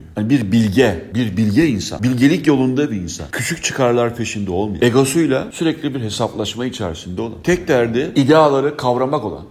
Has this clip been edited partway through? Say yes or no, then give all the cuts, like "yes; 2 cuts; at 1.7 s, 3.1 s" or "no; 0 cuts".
no; 0 cuts